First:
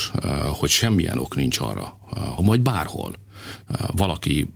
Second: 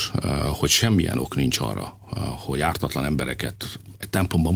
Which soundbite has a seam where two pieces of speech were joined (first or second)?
first